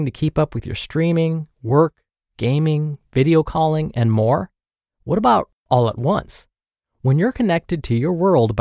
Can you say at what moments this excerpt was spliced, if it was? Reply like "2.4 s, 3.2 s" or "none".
none